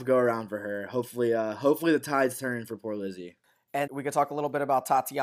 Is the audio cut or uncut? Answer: cut